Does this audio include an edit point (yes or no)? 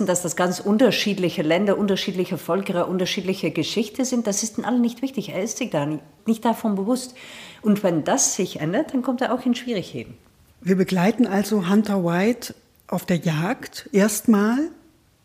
no